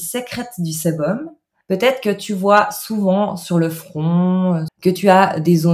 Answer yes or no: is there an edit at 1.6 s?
yes